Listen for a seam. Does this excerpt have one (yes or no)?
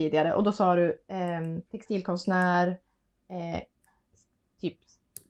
yes